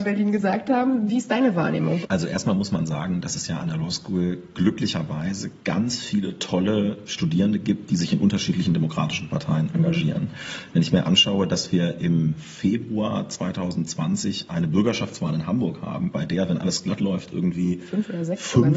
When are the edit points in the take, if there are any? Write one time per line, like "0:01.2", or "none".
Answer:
0:02.0